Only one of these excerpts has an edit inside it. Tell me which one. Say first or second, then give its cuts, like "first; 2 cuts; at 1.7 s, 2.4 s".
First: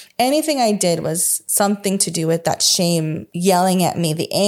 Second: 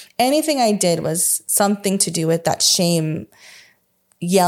first; 1 cut; at 3.3 s